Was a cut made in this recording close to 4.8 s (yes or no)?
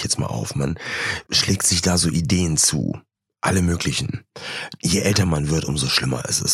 yes